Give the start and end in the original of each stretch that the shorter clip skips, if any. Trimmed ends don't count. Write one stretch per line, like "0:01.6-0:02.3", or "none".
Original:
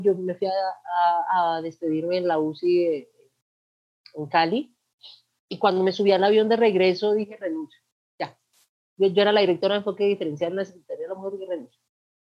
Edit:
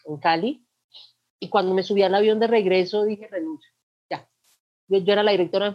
none